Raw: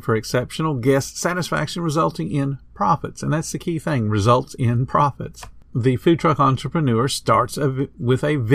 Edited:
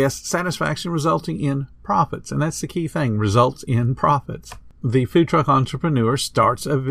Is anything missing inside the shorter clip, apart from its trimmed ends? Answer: no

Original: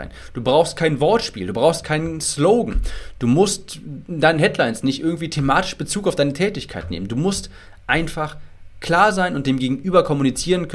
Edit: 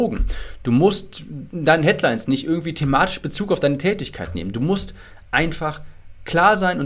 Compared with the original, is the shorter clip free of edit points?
yes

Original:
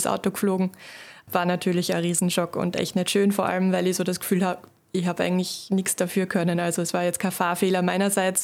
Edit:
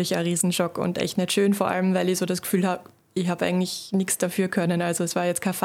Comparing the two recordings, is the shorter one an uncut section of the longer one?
yes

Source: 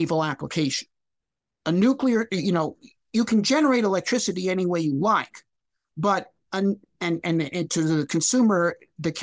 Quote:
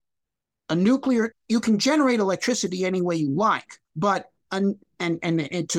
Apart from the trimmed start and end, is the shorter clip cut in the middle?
yes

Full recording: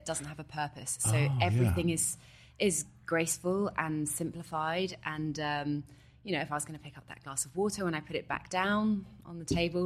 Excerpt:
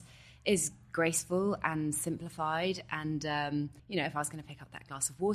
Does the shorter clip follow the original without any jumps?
no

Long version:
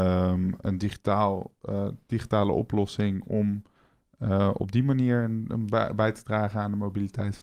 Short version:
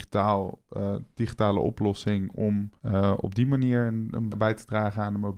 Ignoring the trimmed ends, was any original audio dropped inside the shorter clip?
yes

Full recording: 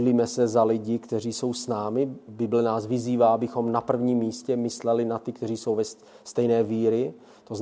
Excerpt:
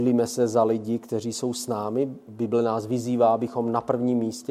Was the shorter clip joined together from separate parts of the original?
no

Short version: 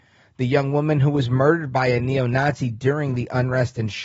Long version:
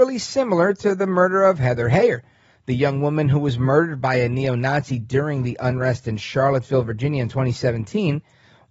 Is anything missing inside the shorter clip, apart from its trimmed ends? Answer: no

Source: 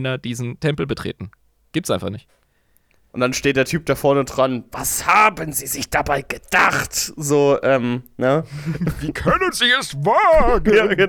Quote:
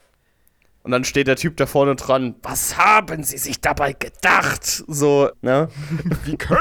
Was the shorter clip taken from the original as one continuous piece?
no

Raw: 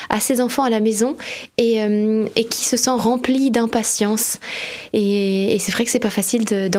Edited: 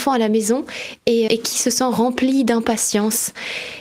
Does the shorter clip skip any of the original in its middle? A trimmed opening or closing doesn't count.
yes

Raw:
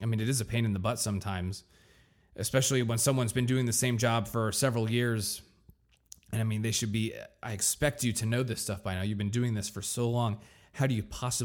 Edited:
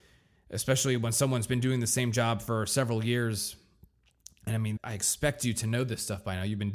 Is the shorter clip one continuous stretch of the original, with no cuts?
no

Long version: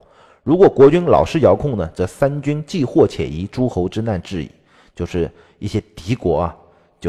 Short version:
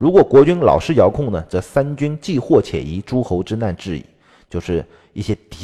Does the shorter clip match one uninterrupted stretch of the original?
yes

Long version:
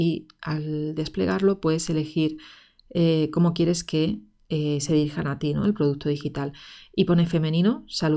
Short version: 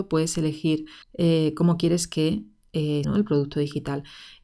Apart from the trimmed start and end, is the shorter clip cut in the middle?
yes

